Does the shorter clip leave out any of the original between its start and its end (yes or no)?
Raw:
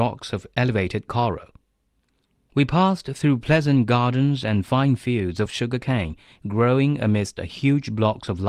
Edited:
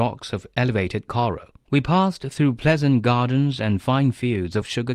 yes